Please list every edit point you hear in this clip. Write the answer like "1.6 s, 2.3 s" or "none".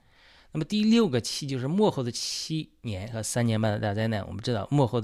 none